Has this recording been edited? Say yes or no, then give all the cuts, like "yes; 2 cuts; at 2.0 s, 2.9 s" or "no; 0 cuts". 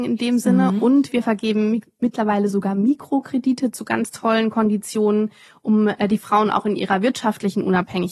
no; 0 cuts